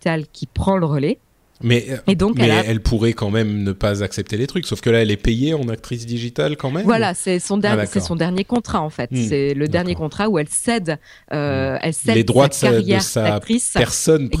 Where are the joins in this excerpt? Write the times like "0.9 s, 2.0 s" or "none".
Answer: none